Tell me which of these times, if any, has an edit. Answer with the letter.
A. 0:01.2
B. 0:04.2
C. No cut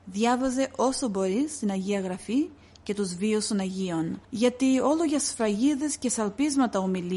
B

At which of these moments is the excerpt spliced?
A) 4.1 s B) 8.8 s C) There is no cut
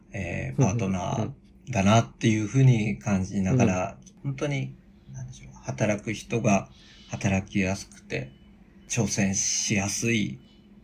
C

